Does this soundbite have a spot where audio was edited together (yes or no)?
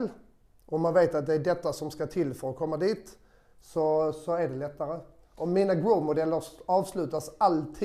no